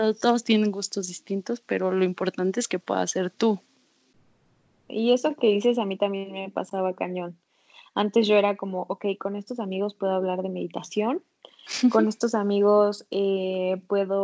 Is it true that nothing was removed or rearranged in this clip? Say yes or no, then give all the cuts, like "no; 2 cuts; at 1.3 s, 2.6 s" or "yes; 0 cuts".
no; 1 cut; at 4.9 s